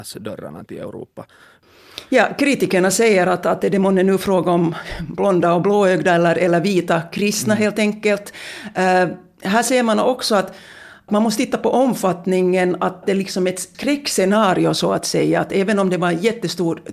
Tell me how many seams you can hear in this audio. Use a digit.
0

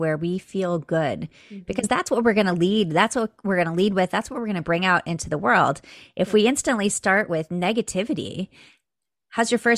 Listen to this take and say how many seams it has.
0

